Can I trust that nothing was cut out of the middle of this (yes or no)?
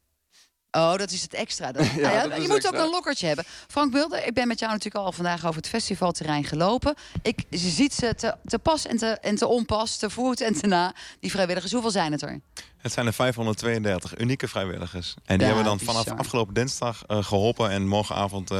yes